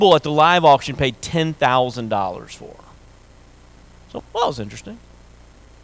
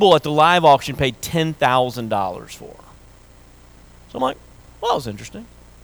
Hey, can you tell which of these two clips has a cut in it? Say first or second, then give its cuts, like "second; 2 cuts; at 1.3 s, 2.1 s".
first; 1 cut; at 4.2 s